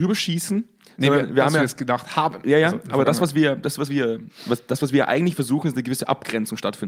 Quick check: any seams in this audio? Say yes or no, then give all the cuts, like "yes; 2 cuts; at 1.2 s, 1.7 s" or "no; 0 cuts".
no; 0 cuts